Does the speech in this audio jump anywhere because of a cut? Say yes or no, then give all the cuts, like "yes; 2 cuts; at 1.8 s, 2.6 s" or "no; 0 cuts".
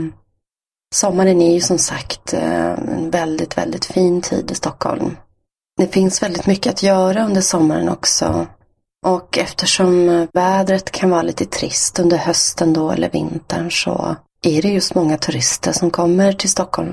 no; 0 cuts